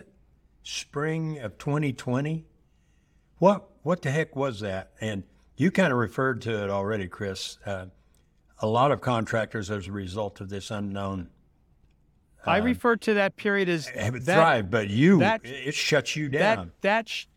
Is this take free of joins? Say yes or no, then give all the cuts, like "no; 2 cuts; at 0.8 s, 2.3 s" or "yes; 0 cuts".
yes; 0 cuts